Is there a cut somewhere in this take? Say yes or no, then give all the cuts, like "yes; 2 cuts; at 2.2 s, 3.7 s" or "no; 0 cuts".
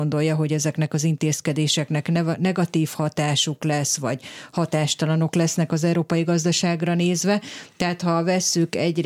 no; 0 cuts